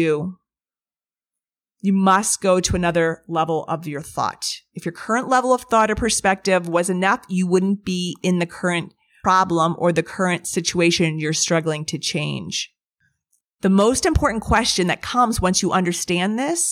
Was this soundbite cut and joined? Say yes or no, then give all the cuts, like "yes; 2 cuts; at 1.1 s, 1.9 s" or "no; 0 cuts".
no; 0 cuts